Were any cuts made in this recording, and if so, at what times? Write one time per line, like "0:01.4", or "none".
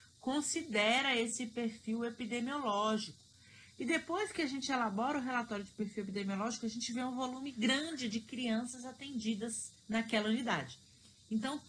0:03.8
0:09.8